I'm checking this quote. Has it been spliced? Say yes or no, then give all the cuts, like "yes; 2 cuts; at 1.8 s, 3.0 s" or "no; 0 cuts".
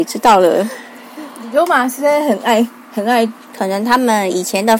yes; 1 cut; at 3.5 s